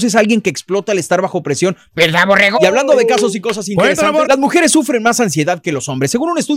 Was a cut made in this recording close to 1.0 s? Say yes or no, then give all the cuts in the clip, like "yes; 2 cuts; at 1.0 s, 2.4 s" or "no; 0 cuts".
no; 2 cuts; at 2.5 s, 4.2 s